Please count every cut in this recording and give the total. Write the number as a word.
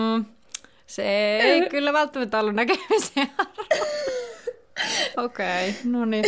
one